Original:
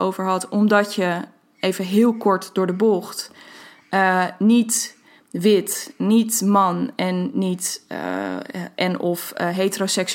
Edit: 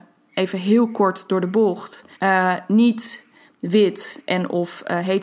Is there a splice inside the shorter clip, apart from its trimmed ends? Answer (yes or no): yes